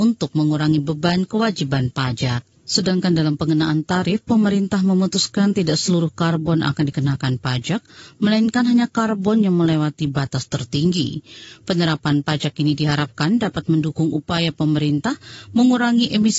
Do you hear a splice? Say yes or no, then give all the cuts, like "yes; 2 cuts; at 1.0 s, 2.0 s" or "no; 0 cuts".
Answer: yes; 1 cut; at 2.6 s